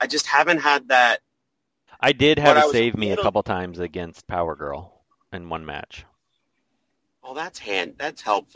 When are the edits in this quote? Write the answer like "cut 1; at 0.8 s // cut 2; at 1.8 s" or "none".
cut 1; at 1.9 s

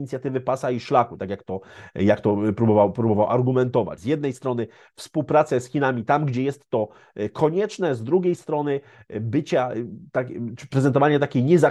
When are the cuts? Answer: cut 1; at 4.0 s

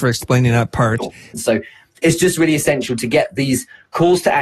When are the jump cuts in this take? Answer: cut 1; at 1.3 s

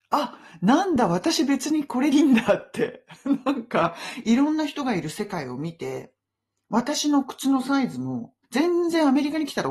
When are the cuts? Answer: cut 1; at 2.1 s // cut 2; at 8.4 s

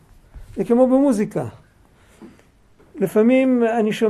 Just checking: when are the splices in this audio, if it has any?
none

